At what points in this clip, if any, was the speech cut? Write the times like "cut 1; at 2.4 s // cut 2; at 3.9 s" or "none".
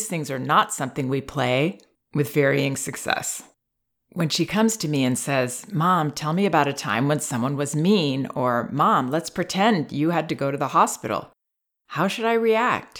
none